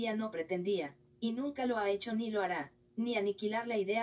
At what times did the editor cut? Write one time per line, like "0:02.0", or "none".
0:02.9